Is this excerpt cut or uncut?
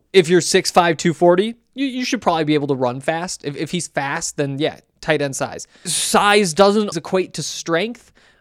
cut